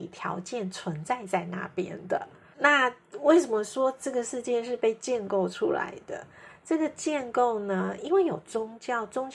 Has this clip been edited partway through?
yes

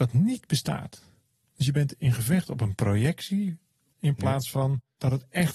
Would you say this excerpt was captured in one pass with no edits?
no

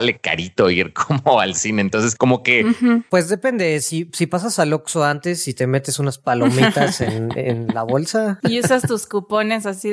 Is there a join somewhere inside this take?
no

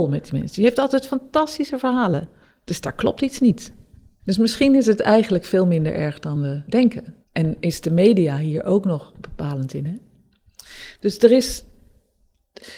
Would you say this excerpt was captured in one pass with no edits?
yes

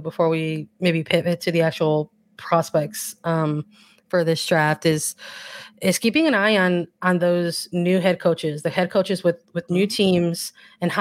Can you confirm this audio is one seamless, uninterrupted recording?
yes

